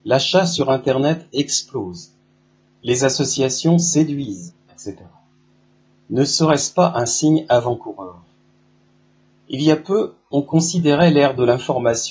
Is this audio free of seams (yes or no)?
no